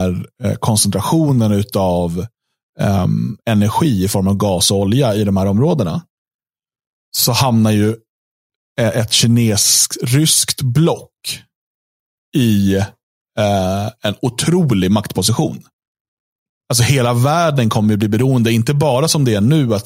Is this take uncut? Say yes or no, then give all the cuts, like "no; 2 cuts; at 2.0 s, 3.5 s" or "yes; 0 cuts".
yes; 0 cuts